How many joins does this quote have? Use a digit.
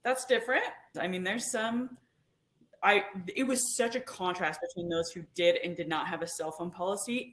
1